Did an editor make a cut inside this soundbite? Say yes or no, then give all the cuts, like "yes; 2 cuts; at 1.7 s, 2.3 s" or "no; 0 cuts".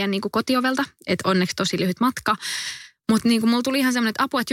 no; 0 cuts